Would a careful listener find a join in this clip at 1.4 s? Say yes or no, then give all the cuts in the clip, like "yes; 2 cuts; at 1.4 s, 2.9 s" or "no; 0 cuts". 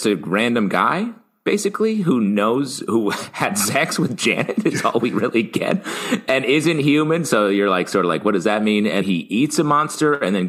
no; 1 cut; at 9.0 s